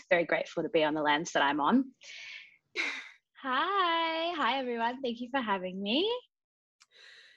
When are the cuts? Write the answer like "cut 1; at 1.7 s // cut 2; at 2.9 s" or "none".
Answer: cut 1; at 2.8 s